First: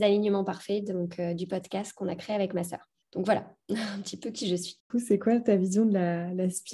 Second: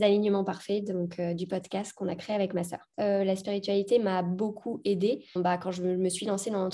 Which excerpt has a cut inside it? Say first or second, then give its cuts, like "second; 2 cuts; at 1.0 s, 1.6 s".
second; 2 cuts; at 2.9 s, 5.4 s